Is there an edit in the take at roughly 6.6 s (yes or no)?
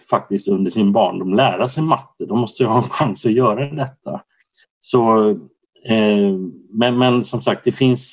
no